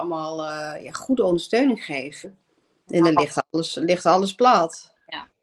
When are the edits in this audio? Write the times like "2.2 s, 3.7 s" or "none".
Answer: 2.2 s